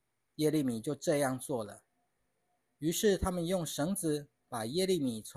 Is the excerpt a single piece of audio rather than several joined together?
yes; 0 cuts

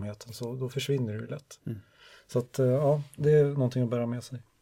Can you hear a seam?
no; 0 cuts

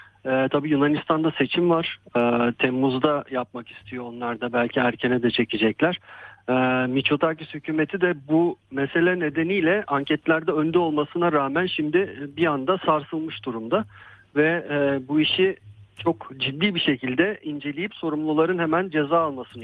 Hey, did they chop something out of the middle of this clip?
no; 0 cuts

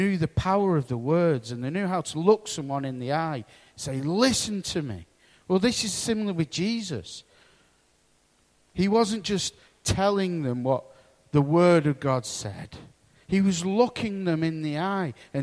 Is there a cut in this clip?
no; 0 cuts

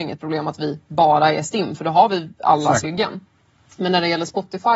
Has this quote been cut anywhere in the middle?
yes; 1 cut; at 2.8 s

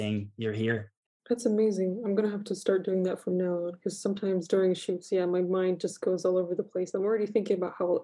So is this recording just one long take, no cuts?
no; 1 cut; at 1.1 s

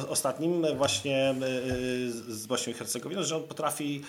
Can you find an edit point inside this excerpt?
yes; 1 cut; at 2.1 s

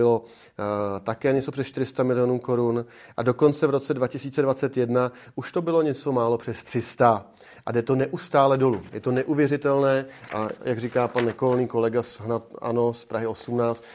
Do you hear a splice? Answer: no; 0 cuts

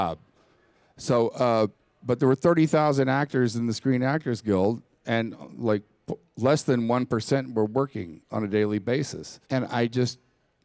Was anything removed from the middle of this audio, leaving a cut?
yes; 1 cut; at 9.4 s

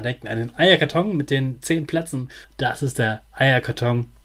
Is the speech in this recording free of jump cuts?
no; 1 cut; at 2.4 s

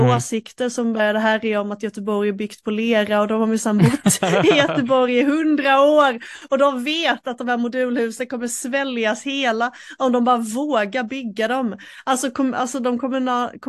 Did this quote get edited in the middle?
no; 0 cuts

